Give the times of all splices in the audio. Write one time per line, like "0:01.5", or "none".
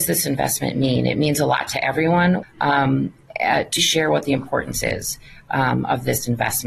0:02.4
0:03.8